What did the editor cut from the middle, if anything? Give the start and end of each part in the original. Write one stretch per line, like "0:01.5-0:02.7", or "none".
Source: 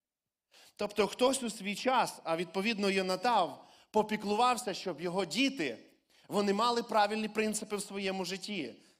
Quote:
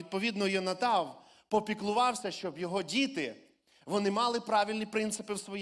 none